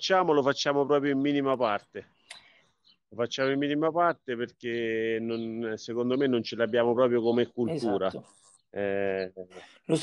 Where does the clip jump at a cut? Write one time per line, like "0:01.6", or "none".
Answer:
none